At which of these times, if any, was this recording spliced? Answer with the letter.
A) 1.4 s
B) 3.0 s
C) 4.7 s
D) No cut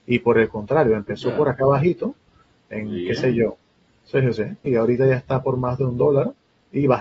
C